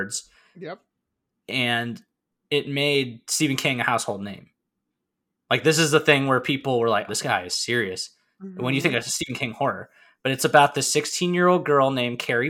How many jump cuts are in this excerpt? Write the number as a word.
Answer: one